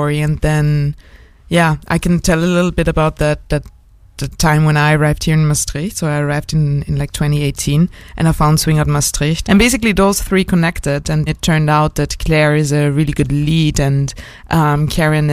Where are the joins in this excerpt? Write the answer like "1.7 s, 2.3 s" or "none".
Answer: 9.4 s, 11.3 s